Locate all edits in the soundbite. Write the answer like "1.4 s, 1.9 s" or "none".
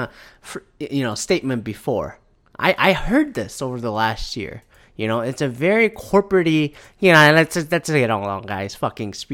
none